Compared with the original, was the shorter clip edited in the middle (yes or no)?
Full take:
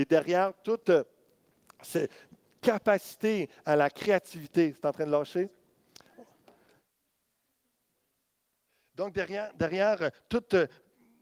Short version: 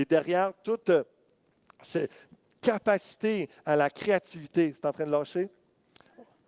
no